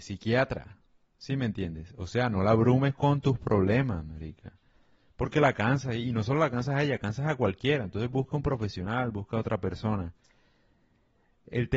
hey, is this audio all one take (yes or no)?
yes